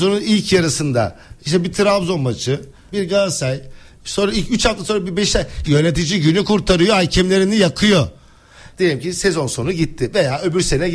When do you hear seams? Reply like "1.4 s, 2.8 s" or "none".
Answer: 2.9 s, 5.6 s, 8.7 s

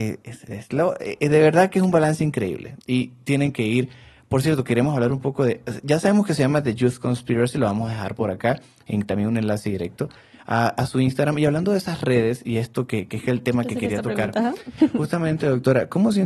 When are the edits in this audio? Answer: none

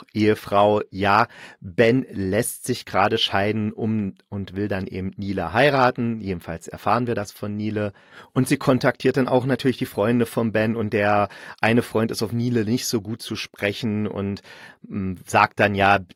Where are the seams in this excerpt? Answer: none

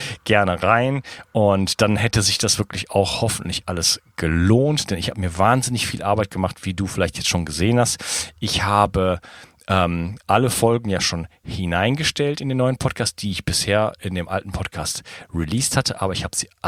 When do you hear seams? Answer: none

